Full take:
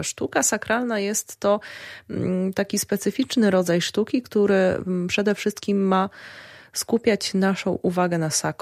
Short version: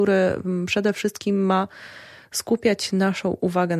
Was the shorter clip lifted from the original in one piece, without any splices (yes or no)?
yes